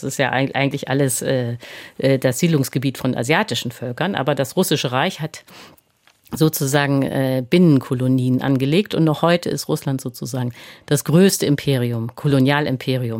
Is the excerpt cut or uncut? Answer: uncut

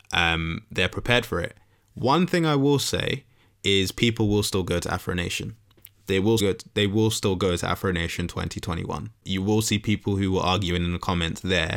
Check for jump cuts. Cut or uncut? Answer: cut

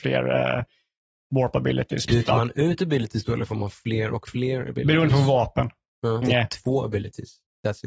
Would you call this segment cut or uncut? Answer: cut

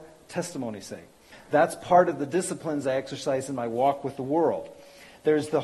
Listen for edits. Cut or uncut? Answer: cut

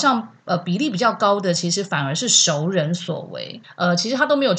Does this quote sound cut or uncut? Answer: cut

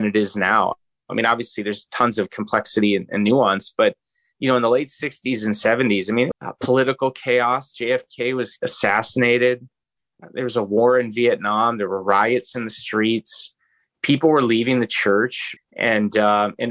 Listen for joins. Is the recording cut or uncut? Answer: cut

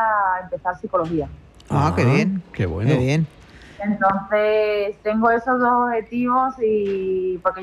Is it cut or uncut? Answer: uncut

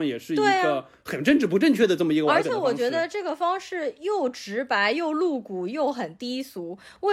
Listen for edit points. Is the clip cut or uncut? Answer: uncut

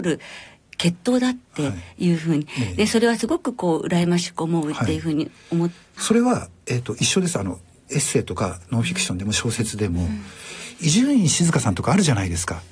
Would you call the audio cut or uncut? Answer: cut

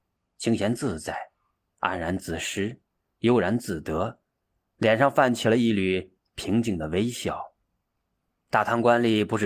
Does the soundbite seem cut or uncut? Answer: uncut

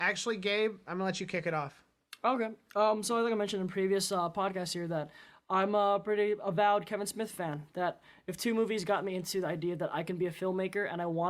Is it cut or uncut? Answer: uncut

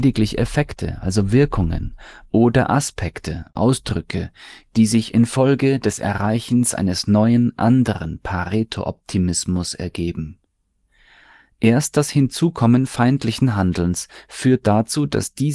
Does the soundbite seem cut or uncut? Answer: uncut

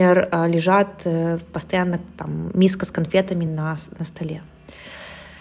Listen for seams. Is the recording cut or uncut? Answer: uncut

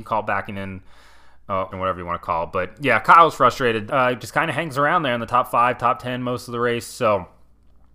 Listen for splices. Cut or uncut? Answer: cut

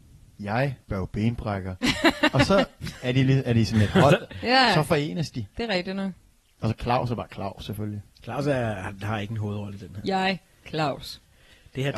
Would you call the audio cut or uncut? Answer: cut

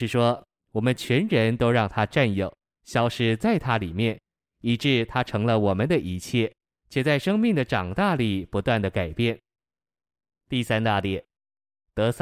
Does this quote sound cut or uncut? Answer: cut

